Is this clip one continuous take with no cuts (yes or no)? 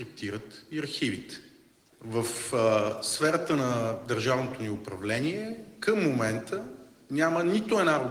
yes